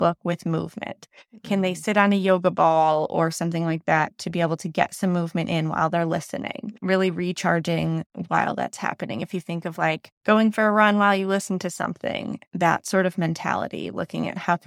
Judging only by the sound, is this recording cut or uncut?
cut